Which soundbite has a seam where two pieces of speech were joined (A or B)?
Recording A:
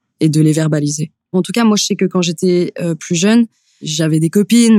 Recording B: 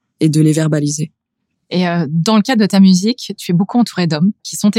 A